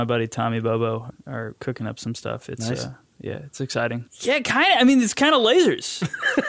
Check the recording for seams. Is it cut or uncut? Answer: cut